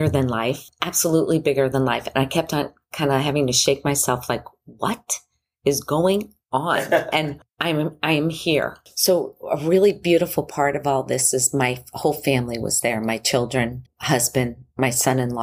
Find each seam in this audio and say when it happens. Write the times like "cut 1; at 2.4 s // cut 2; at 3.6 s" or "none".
cut 1; at 13.9 s